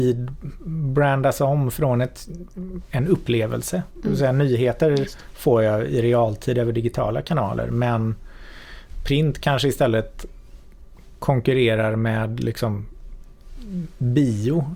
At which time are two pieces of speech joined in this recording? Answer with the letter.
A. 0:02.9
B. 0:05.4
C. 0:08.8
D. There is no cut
A